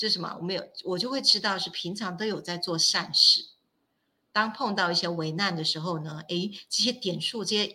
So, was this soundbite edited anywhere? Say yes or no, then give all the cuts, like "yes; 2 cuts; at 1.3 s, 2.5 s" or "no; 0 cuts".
no; 0 cuts